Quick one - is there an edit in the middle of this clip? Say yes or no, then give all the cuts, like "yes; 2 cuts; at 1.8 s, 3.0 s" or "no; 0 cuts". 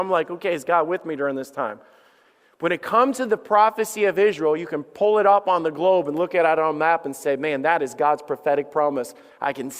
no; 0 cuts